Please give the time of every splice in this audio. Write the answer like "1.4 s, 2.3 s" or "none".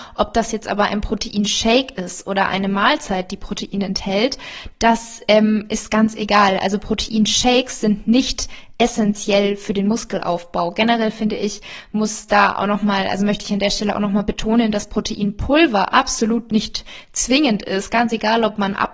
none